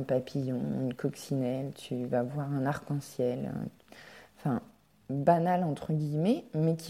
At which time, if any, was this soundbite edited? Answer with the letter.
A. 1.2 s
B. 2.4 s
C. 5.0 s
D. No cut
C